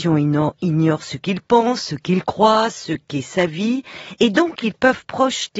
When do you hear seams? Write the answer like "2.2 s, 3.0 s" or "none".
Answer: none